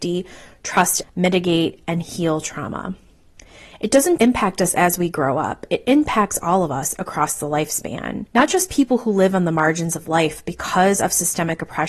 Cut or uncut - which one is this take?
cut